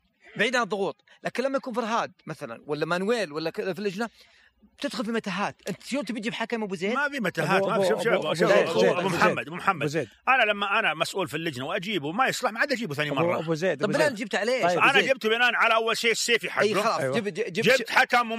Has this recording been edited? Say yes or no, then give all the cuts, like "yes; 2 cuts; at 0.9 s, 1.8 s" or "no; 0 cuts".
yes; 1 cut; at 8.7 s